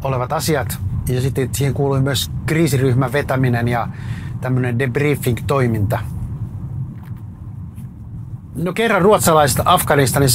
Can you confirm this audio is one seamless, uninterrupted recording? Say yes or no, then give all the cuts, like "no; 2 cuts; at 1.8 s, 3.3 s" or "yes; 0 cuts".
no; 1 cut; at 8.5 s